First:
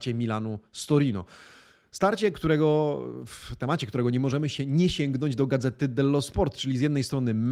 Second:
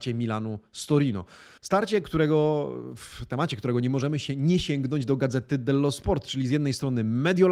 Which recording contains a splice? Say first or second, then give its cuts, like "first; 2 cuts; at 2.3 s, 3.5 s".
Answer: second; 1 cut; at 1.6 s